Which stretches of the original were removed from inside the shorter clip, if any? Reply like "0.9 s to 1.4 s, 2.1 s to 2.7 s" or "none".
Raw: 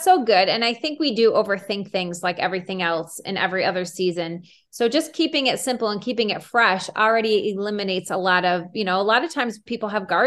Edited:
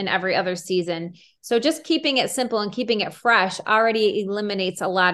none